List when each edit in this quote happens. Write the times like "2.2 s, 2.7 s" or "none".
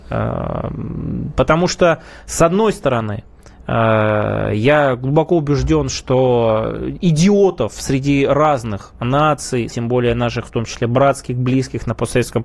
9.7 s